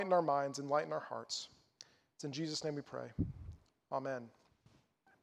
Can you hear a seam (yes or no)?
no